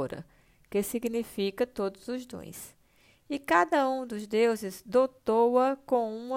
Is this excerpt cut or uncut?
uncut